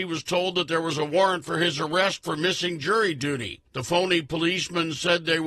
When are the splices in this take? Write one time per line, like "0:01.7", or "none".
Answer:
0:03.7

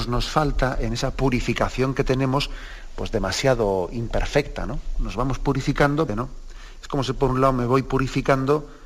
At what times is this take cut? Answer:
0:06.1

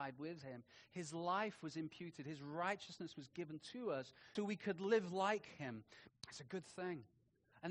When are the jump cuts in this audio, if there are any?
0:04.4
0:06.1

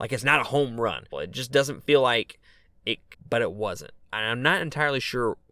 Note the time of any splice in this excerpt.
0:01.1
0:03.1

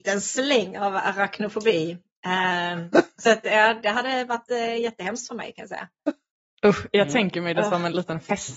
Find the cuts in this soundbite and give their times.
none

